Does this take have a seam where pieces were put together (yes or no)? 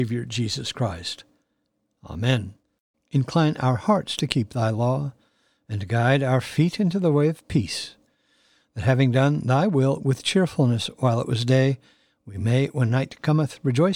yes